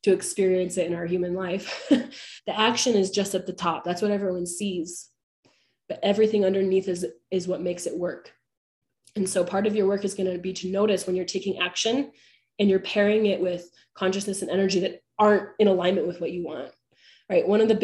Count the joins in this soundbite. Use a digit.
1